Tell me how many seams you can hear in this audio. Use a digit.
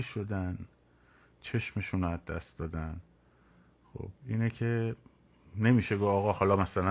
1